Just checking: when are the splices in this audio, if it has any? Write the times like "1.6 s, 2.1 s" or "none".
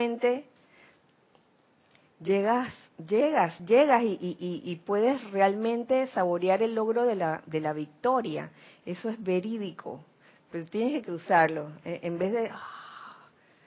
none